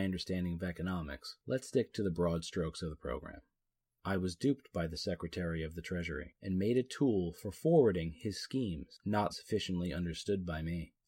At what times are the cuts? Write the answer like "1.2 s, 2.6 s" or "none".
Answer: 3.9 s, 9.3 s